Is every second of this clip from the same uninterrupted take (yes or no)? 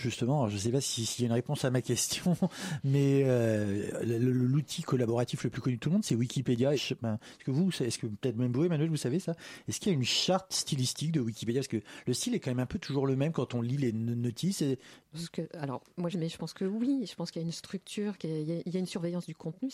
no